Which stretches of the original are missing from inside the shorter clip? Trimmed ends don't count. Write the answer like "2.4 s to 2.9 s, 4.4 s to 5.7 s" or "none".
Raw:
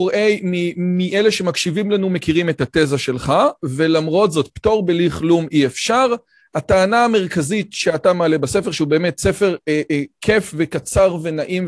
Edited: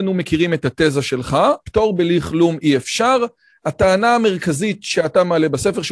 3.6 s to 4.5 s